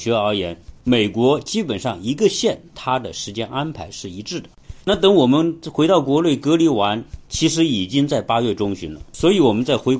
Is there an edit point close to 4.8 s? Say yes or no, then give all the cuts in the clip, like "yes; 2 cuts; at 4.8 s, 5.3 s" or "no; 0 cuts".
yes; 1 cut; at 4.8 s